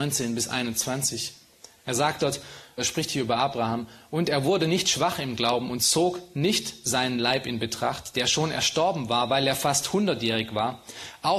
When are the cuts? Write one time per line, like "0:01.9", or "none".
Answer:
0:02.8